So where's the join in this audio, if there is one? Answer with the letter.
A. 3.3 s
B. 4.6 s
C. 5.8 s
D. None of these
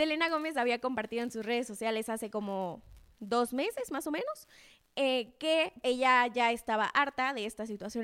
C